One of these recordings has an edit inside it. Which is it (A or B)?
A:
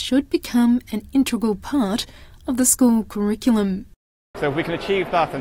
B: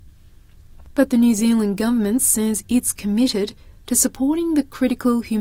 A